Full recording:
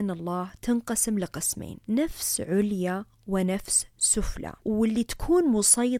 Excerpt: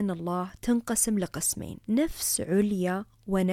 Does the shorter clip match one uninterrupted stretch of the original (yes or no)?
yes